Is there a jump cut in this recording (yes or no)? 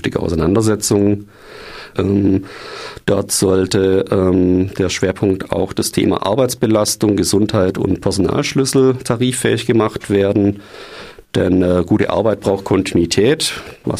yes